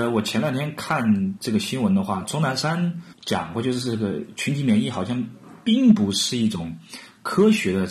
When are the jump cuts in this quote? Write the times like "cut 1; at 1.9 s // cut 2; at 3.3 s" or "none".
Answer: none

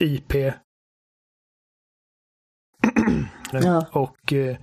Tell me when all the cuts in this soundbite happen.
cut 1; at 3.5 s

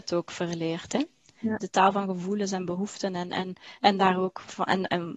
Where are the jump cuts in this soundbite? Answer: cut 1; at 1.6 s

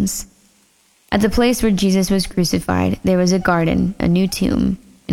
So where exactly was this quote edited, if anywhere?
cut 1; at 4.0 s

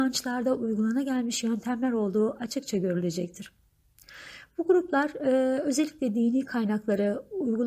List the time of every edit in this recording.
none

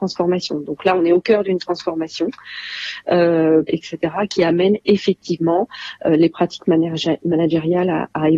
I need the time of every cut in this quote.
cut 1; at 3.7 s

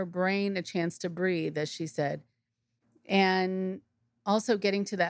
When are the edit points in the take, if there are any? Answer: none

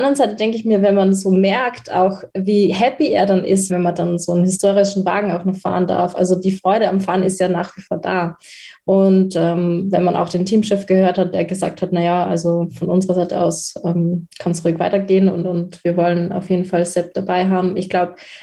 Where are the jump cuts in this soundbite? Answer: cut 1; at 3.7 s

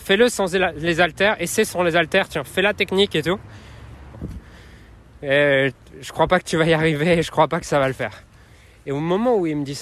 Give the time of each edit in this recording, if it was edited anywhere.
cut 1; at 4.1 s

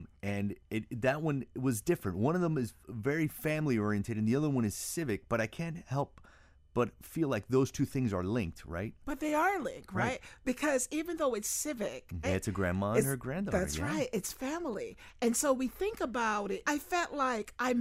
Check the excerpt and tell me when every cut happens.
cut 1; at 12.2 s // cut 2; at 16.6 s

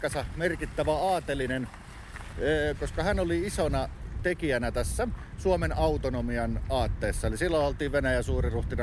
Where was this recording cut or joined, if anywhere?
cut 1; at 2.7 s

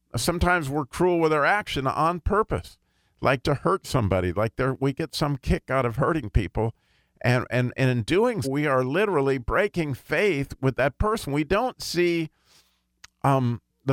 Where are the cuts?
cut 1; at 3.4 s // cut 2; at 8.4 s

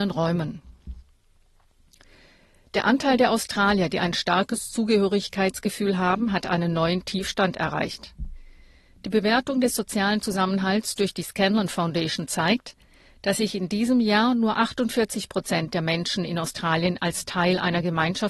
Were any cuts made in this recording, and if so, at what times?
none

